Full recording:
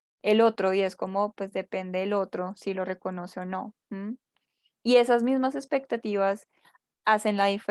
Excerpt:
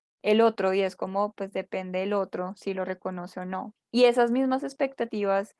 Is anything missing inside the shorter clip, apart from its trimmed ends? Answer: yes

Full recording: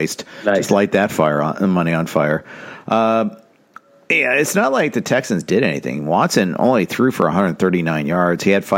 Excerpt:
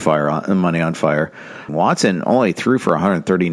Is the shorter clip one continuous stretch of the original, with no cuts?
no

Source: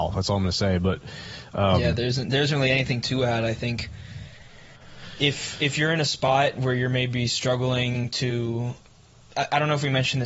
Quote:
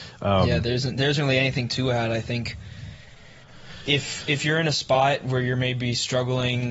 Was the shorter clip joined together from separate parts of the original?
no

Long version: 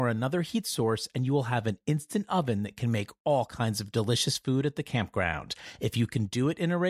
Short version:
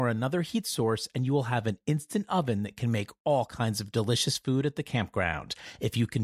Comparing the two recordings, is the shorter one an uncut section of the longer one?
yes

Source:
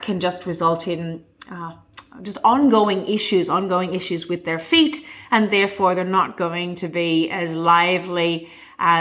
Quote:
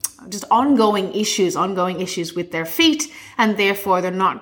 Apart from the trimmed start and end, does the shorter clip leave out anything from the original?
no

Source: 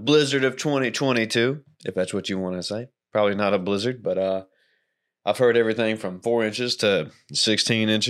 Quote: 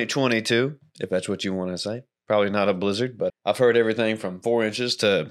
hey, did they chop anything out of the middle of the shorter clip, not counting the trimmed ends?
yes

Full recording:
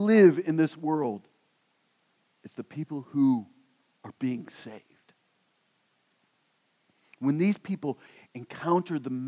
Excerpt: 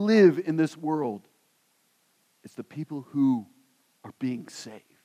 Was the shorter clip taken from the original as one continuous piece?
yes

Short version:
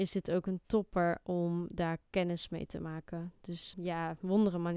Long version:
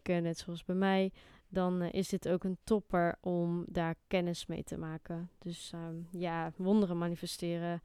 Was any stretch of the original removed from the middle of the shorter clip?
yes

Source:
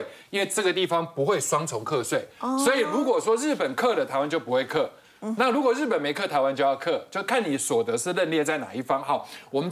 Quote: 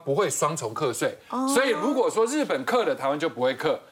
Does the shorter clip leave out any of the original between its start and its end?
no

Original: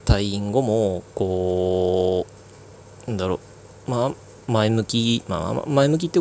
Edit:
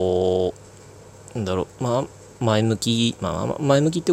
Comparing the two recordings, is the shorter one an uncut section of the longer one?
no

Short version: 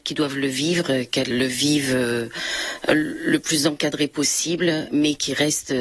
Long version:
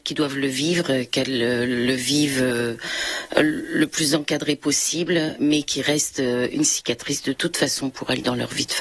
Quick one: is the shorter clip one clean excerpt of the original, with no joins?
no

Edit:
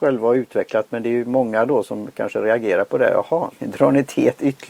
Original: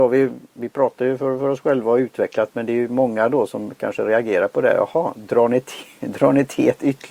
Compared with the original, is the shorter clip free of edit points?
no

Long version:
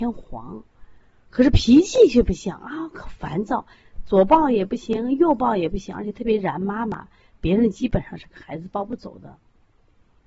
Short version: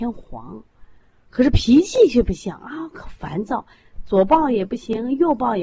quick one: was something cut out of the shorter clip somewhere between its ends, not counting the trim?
no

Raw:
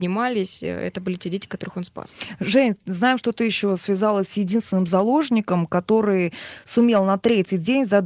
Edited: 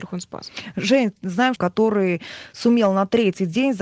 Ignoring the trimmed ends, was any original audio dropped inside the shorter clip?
yes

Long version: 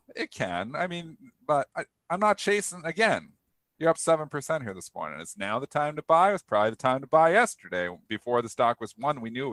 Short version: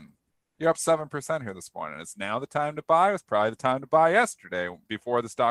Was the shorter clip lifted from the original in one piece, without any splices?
yes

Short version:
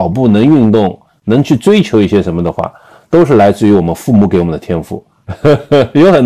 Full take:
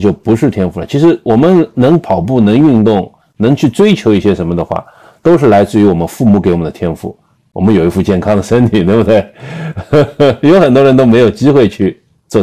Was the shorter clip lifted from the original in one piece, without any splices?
no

